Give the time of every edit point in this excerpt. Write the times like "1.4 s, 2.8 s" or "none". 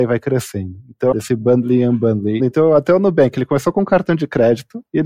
1.1 s, 2.4 s